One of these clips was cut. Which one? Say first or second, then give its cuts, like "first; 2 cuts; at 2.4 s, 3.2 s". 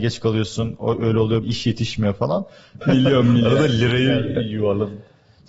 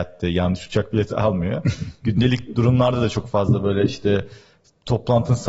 first; 2 cuts; at 1.4 s, 2.8 s